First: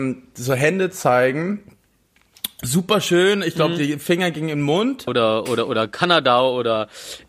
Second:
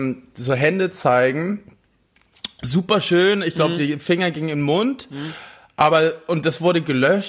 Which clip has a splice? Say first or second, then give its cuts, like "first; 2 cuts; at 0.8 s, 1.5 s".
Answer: first; 1 cut; at 5.1 s